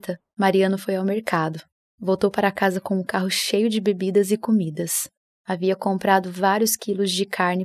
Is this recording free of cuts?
yes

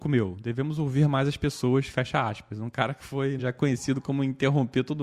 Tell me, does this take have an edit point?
yes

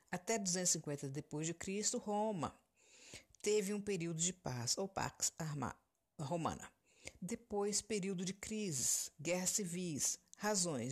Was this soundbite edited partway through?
no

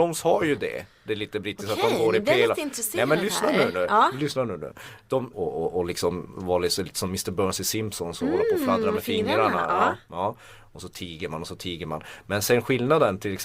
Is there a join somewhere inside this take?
yes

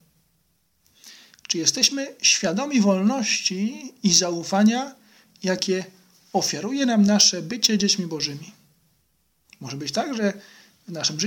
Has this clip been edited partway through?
yes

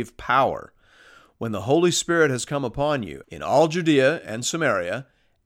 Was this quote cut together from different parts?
yes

